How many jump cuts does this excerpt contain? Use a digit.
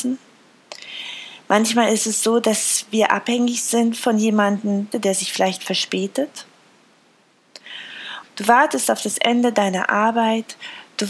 2